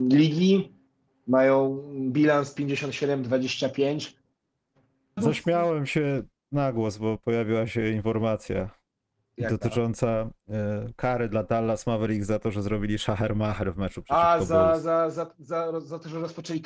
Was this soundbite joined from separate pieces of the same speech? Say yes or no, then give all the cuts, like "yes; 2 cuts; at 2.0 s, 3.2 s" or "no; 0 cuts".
yes; 1 cut; at 5.2 s